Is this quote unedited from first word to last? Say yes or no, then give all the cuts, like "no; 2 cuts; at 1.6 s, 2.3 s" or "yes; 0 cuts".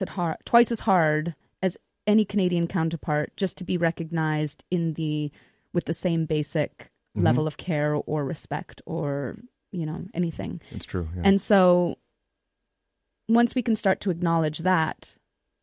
yes; 0 cuts